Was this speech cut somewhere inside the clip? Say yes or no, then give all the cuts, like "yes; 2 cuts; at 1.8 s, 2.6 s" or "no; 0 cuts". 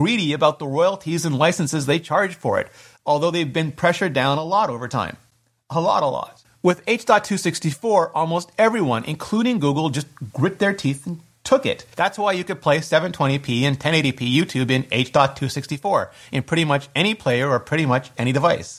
no; 0 cuts